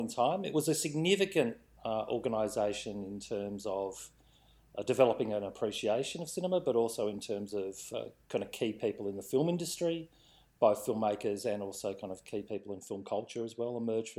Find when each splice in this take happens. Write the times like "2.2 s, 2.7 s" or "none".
none